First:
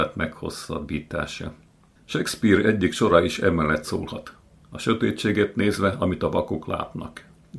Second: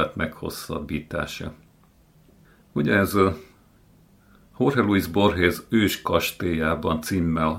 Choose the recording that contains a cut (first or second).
first